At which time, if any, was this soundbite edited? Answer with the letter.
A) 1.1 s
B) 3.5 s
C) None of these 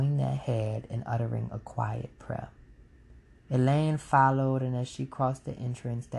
B